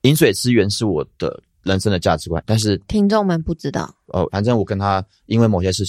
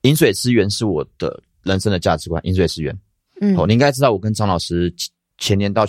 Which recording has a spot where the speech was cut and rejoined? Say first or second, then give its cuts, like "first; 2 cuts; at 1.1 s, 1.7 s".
first; 2 cuts; at 2.4 s, 4.3 s